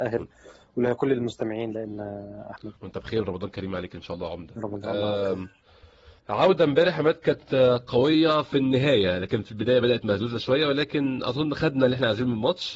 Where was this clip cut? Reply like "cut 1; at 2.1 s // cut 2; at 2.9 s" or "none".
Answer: cut 1; at 2.8 s // cut 2; at 6.2 s